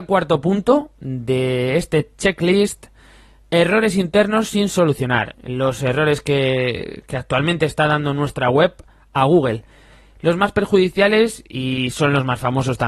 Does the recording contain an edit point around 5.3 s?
yes; 1 cut; at 5.3 s

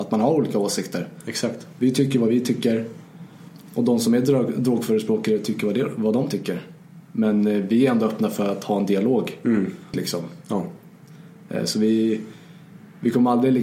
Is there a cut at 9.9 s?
yes; 1 cut; at 9.9 s

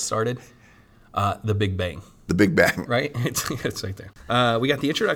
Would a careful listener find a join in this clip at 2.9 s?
yes; 1 cut; at 2.9 s

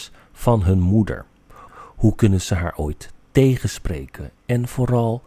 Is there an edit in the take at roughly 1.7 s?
yes; 1 cut; at 1.7 s

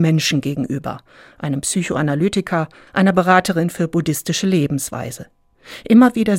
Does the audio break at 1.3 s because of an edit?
no; 1 cut; at 2.9 s

